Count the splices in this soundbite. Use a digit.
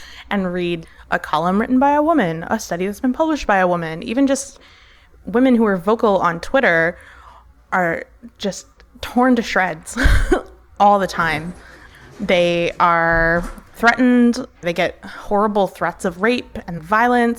0